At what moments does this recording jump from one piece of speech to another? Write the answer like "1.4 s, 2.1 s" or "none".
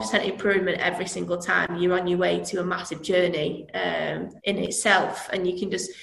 4.4 s